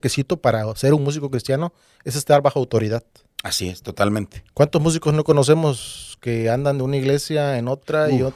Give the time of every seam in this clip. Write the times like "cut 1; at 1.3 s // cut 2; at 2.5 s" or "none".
none